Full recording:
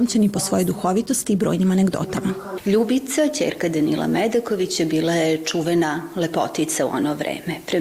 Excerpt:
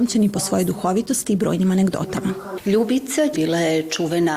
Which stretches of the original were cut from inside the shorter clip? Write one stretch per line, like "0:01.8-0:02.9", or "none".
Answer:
0:03.3-0:04.9